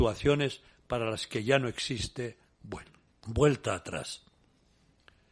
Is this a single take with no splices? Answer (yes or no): yes